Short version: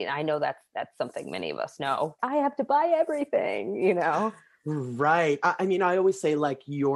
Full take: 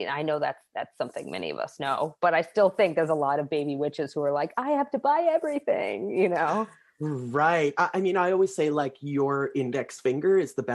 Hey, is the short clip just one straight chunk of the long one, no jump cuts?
no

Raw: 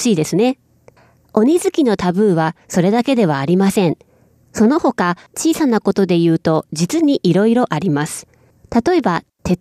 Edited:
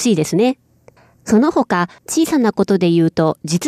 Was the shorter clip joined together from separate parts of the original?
yes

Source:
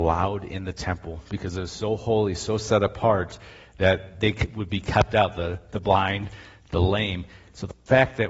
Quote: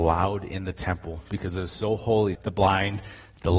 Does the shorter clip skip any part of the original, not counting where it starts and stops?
yes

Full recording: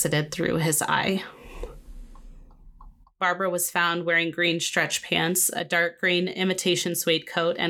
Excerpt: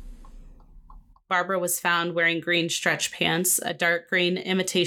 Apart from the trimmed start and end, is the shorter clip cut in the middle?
no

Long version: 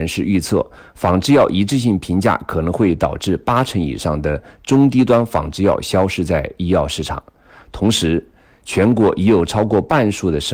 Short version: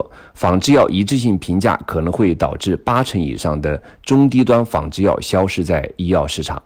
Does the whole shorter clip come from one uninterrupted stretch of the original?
yes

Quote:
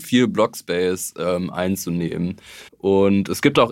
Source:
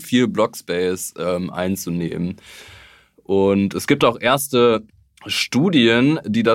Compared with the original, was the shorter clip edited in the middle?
yes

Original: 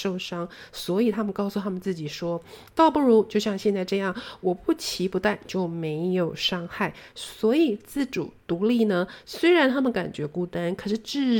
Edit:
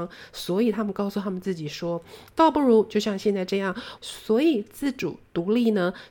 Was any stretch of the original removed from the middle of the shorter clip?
yes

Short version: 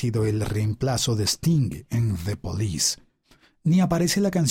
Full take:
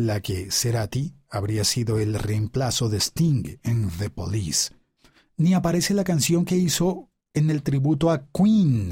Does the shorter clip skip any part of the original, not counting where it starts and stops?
no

